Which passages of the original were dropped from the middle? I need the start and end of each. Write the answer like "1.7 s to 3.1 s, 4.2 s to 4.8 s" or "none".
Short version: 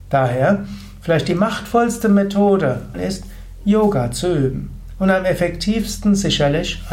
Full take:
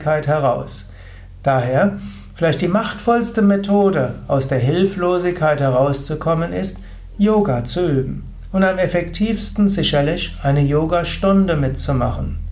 4.3 s to 6.5 s